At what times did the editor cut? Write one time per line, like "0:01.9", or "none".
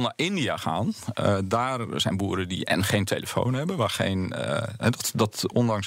none